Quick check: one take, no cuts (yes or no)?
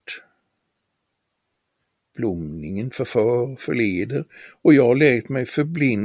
yes